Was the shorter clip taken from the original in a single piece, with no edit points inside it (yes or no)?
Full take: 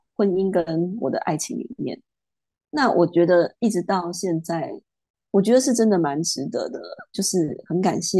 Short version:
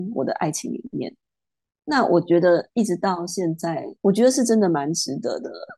no